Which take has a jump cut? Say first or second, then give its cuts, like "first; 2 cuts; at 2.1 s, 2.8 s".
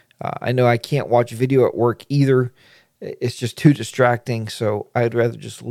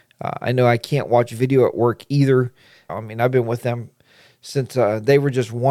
second; 1 cut; at 2.9 s